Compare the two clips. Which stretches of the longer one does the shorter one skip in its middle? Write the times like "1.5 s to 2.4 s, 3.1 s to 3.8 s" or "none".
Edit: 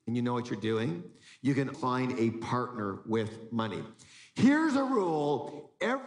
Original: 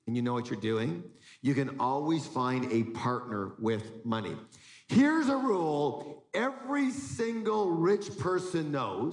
1.7 s to 2.3 s